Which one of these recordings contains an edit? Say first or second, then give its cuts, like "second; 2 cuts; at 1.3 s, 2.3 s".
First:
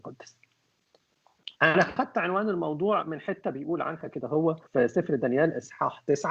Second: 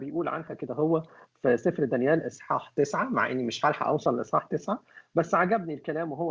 first; 2 cuts; at 1.5 s, 4.7 s